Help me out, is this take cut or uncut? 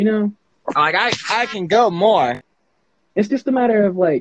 uncut